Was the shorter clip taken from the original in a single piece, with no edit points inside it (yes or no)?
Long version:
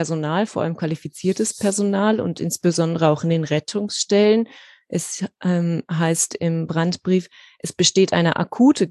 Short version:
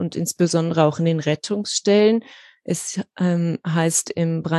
yes